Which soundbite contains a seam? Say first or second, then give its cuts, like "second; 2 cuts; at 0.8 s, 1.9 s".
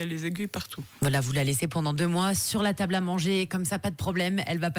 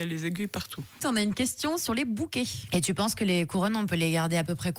second; 2 cuts; at 1.0 s, 2.7 s